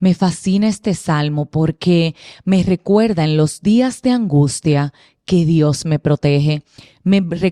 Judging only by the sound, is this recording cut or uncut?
uncut